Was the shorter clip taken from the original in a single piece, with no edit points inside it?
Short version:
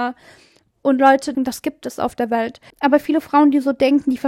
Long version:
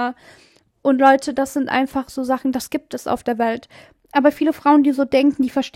no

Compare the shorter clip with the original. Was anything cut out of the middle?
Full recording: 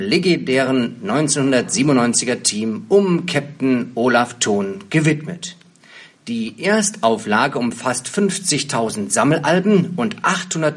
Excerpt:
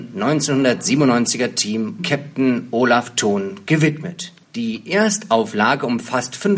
yes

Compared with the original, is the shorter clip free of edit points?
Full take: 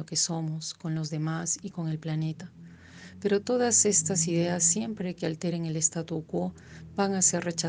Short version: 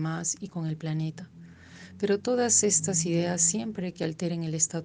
yes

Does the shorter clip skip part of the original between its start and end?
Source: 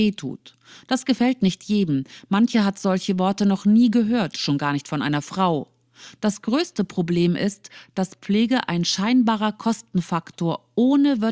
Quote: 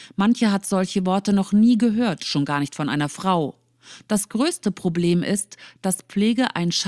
no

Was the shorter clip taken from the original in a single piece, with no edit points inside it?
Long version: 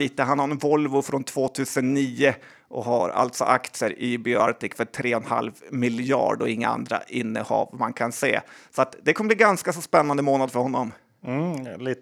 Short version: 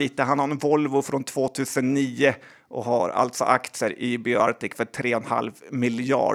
yes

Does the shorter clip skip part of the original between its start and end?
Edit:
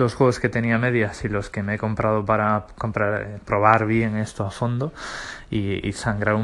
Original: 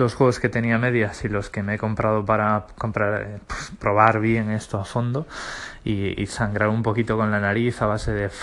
yes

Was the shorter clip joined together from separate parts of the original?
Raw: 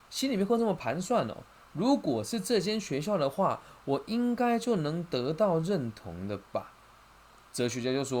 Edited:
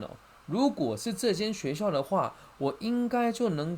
no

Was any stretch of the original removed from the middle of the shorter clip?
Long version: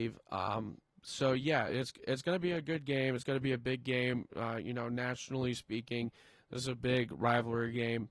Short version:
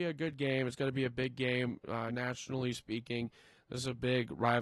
yes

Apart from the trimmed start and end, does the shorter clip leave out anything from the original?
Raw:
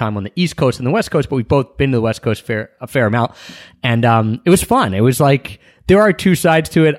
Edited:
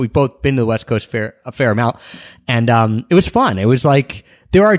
no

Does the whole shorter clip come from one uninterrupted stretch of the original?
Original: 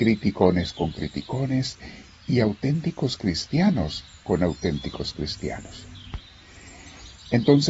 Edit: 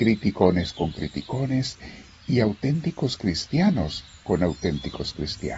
yes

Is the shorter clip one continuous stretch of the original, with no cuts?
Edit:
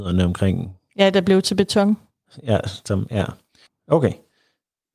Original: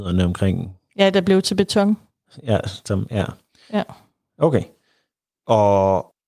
no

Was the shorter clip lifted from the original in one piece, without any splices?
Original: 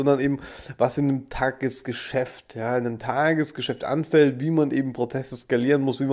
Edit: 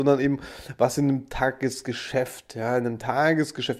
yes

